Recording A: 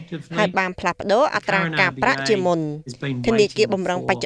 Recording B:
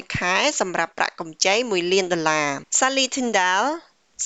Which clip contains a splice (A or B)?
B